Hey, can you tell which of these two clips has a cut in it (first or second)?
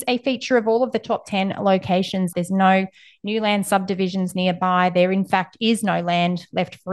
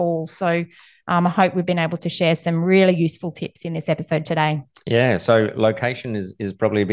first